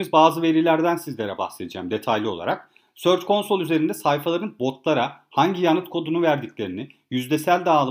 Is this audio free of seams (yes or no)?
yes